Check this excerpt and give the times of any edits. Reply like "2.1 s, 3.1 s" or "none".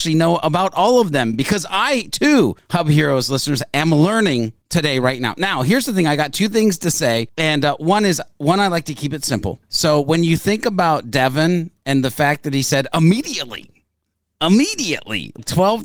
none